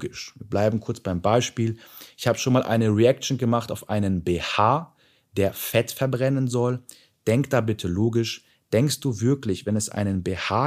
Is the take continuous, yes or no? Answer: yes